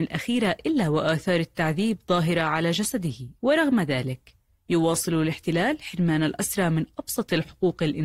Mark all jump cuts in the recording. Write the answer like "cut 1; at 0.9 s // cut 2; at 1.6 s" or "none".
cut 1; at 3.4 s